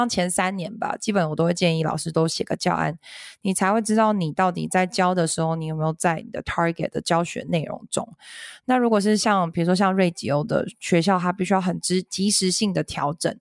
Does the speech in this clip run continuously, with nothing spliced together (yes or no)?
yes